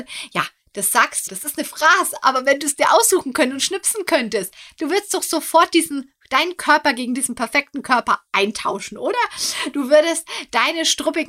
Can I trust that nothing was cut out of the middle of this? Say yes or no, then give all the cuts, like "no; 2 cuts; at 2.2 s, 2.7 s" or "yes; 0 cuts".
no; 1 cut; at 1.3 s